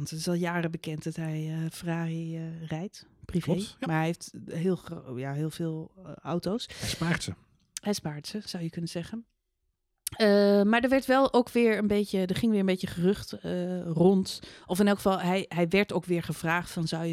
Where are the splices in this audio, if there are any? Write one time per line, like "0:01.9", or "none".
none